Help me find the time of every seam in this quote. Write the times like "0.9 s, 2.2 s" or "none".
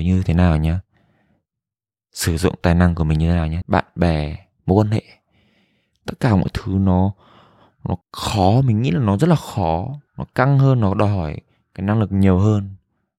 3.6 s, 8.0 s, 10.1 s